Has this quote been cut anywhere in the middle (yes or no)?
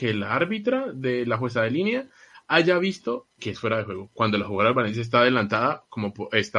yes